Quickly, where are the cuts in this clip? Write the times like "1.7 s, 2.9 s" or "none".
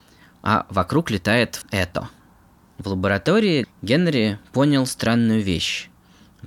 1.6 s, 3.6 s

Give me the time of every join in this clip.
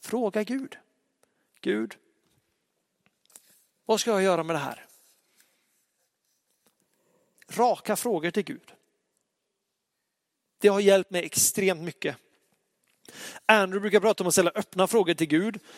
none

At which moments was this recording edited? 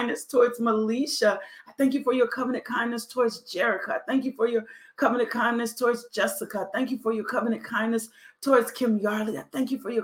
none

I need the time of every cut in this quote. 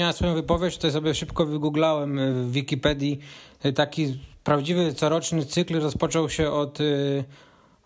none

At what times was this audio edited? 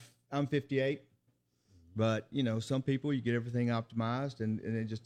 1.3 s

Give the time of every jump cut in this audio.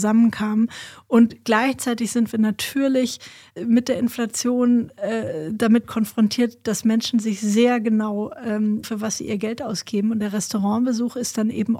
8.8 s

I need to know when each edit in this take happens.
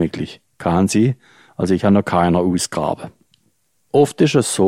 3.7 s

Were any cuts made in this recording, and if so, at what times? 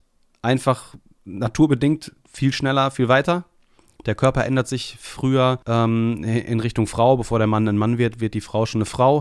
none

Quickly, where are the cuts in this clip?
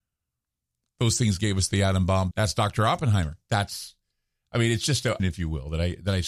2.3 s, 5.2 s

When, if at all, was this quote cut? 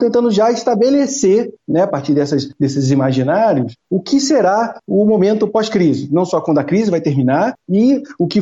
none

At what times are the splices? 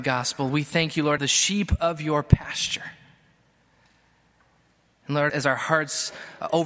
1.2 s, 5.3 s

